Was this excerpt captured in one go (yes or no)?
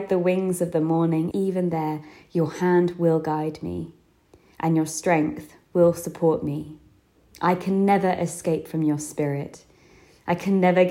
no